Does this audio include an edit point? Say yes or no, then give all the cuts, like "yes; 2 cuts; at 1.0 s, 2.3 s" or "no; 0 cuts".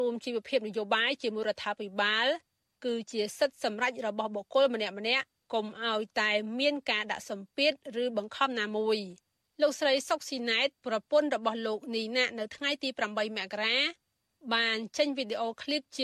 no; 0 cuts